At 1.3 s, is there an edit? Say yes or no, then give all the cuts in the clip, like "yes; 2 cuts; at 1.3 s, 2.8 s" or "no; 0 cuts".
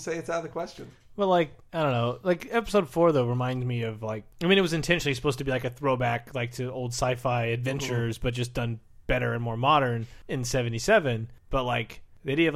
no; 0 cuts